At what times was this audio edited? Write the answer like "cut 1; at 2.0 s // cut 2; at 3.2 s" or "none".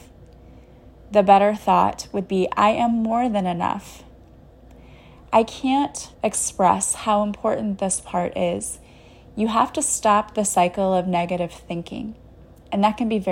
cut 1; at 6.1 s